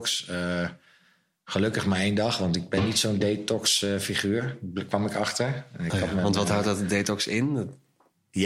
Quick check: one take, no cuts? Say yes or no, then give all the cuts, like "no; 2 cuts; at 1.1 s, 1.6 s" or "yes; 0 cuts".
yes; 0 cuts